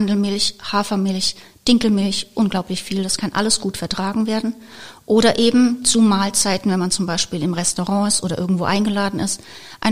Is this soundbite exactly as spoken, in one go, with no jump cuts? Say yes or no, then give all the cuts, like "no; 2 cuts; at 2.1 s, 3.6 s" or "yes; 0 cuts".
yes; 0 cuts